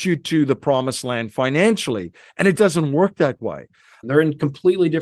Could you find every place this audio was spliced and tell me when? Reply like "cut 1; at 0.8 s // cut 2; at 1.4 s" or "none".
cut 1; at 2.6 s // cut 2; at 4.0 s